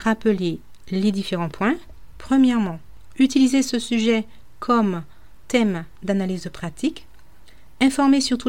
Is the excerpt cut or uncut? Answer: cut